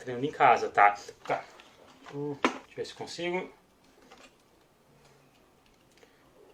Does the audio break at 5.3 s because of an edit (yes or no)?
no